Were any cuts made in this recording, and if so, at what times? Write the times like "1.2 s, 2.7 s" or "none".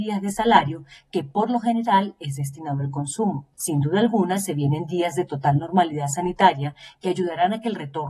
3.5 s

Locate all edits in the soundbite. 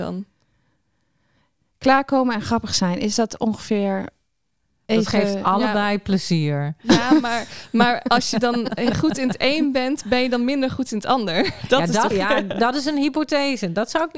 12.1 s

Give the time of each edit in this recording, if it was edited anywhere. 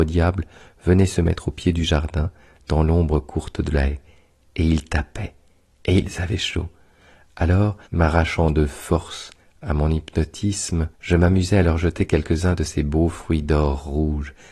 7.9 s, 10.9 s

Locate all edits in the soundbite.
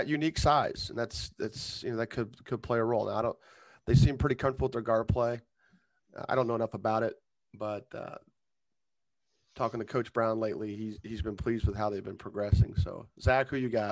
none

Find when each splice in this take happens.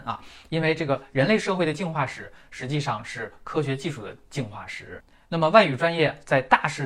none

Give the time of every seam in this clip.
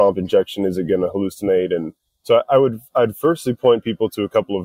none

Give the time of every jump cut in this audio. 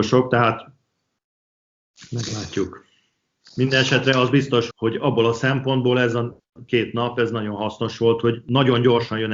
4.7 s

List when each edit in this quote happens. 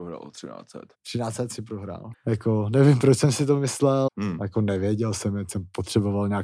0.9 s, 2.1 s, 4.1 s

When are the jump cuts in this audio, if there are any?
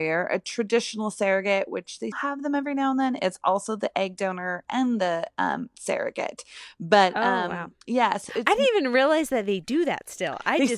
2.1 s, 8.3 s

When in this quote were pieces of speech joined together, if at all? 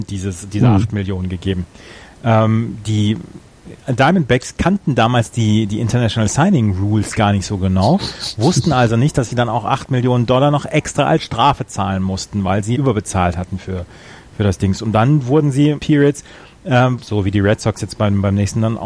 12.7 s, 15.8 s, 17.0 s

